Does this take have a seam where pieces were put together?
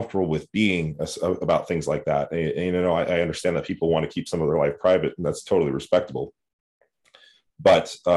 no; 0 cuts

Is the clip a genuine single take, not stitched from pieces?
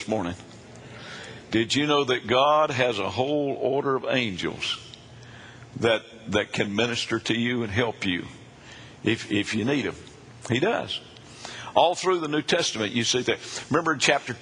yes; 0 cuts

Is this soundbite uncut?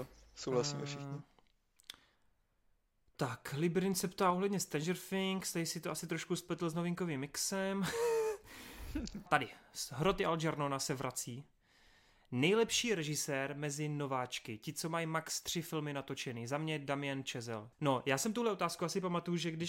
no; 2 cuts; at 9.3 s, 17.7 s

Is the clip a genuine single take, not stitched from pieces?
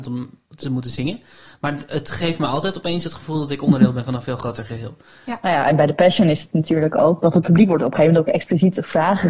no; 2 cuts; at 5.4 s, 7.2 s

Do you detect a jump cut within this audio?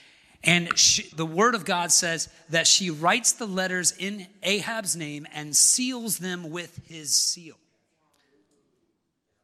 yes; 1 cut; at 1.1 s

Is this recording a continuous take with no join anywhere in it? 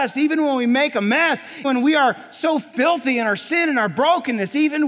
no; 1 cut; at 1.6 s

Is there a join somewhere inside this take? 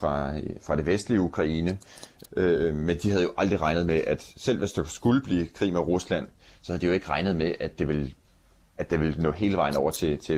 yes; 1 cut; at 2.2 s

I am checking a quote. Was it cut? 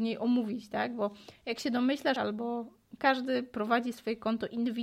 yes; 1 cut; at 2.2 s

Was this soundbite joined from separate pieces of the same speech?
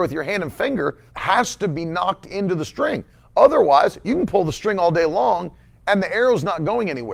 yes; 1 cut; at 1.1 s

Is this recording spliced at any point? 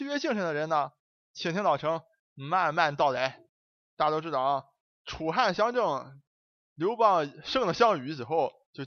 no; 0 cuts

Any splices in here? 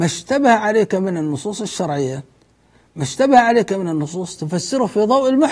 no; 0 cuts

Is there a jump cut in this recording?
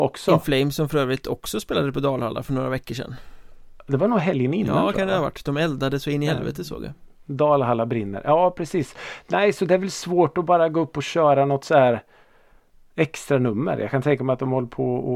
no; 0 cuts

